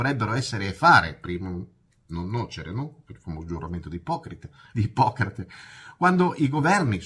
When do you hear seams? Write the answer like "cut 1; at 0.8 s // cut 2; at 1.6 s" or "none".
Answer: cut 1; at 4.7 s